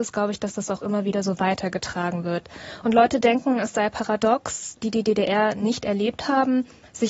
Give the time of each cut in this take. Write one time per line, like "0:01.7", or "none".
0:02.8
0:04.8